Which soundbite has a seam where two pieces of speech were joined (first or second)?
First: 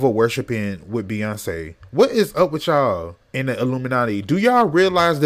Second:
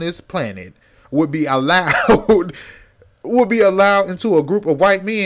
first